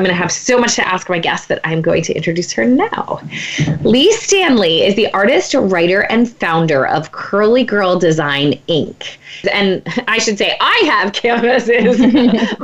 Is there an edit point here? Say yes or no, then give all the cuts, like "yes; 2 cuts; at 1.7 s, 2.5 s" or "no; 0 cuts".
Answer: yes; 1 cut; at 9.4 s